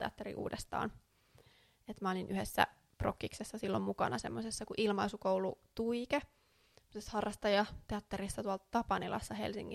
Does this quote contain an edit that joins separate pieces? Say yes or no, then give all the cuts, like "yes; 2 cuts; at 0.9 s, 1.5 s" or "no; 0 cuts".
no; 0 cuts